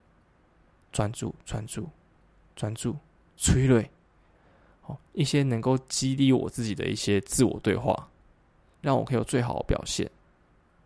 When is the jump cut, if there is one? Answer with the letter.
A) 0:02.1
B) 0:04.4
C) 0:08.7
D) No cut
C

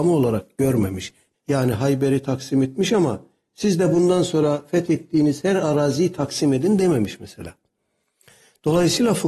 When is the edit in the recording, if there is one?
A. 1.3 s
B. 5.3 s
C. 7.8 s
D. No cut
A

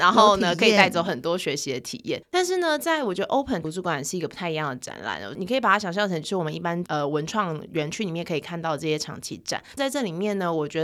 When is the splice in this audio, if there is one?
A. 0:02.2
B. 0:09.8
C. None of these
B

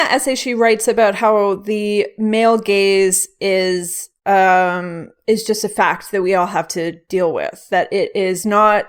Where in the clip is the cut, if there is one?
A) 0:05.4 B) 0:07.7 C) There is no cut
C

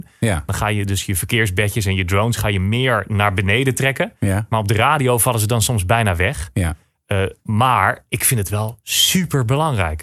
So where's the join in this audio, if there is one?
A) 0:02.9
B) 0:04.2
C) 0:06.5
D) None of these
D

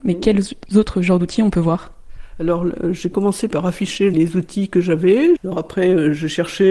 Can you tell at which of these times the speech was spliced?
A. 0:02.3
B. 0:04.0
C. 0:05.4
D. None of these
C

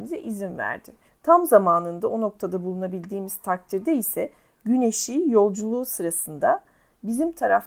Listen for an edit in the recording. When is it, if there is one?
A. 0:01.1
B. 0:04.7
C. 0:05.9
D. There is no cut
A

